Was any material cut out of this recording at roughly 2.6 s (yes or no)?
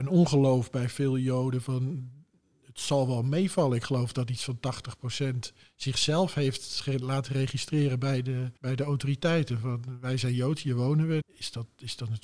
no